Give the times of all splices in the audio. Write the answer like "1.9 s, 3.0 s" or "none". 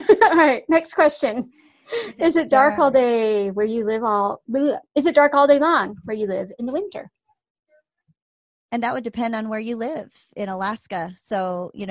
none